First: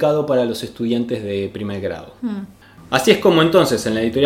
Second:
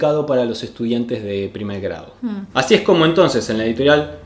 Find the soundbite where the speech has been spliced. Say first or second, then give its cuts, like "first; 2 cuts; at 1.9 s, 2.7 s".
second; 1 cut; at 2.5 s